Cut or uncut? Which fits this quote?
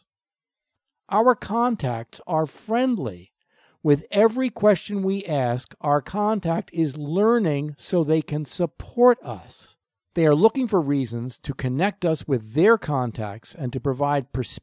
uncut